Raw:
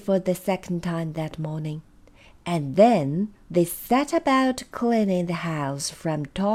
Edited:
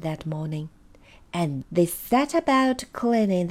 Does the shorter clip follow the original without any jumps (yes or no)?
no